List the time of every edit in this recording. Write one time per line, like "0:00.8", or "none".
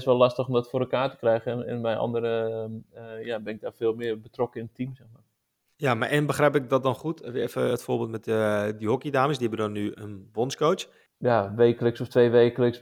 0:11.1